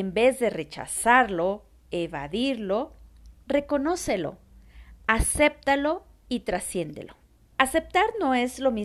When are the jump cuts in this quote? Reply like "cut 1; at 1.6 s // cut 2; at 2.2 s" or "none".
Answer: cut 1; at 7.5 s